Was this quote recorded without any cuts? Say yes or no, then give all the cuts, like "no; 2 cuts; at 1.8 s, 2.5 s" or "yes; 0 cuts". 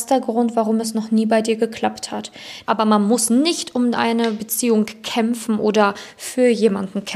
no; 1 cut; at 2.6 s